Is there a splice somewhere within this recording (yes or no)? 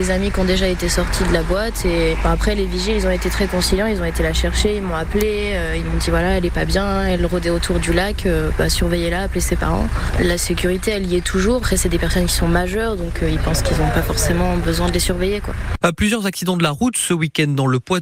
yes